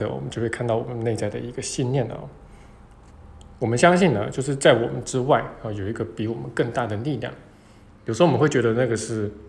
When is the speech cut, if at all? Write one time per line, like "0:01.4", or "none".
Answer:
0:07.9